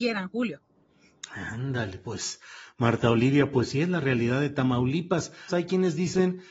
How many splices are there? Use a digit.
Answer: 1